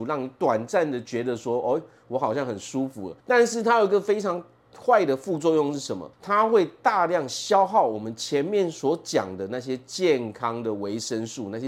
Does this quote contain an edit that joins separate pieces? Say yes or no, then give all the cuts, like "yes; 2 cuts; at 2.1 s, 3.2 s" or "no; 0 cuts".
yes; 2 cuts; at 3.2 s, 6.1 s